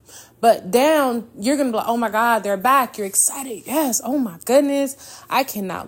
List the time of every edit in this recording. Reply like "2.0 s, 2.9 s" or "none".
none